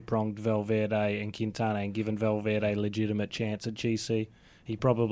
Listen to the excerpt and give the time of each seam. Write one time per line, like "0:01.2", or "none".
none